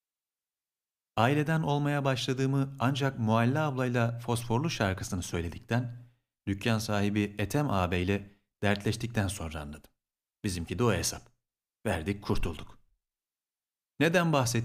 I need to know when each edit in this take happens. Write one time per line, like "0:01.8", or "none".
0:10.3